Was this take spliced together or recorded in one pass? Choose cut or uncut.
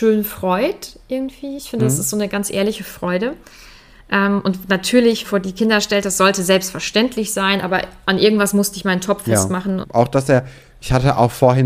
cut